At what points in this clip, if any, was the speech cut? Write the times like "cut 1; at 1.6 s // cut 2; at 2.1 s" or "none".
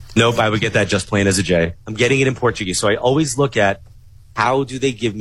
cut 1; at 1.8 s